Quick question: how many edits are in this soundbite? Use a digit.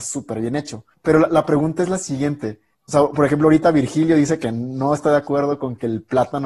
0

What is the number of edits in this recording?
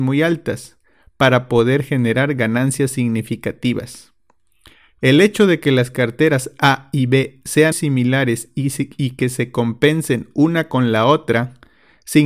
1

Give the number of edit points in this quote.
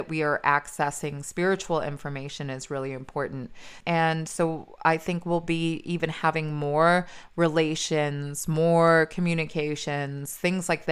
1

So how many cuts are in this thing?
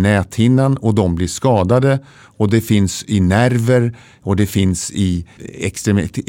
1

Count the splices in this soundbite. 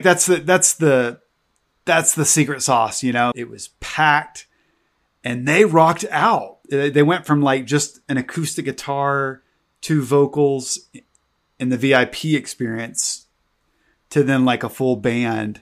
1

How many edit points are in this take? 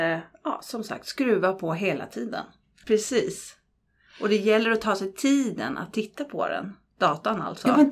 1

